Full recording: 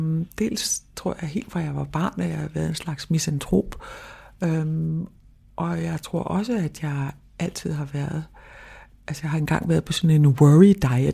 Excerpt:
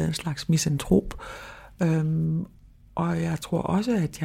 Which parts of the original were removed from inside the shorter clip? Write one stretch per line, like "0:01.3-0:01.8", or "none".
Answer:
none